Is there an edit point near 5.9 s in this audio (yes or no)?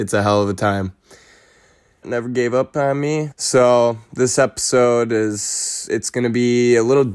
yes